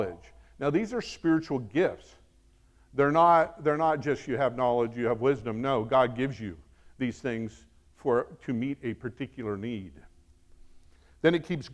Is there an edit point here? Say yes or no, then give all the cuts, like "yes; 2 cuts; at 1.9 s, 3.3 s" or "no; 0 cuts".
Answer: no; 0 cuts